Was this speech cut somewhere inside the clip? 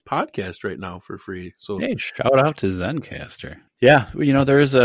yes; 1 cut; at 3.7 s

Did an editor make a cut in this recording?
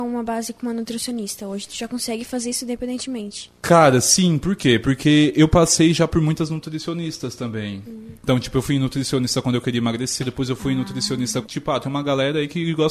yes; 2 cuts; at 10.2 s, 11.4 s

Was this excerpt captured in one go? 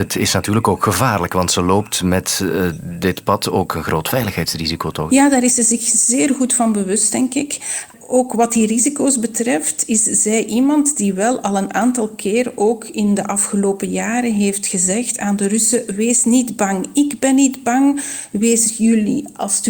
no; 1 cut; at 5.1 s

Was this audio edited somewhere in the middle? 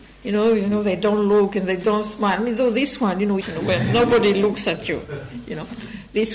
yes; 1 cut; at 3.4 s

